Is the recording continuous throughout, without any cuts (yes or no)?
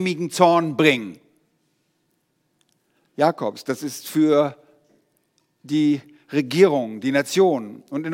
no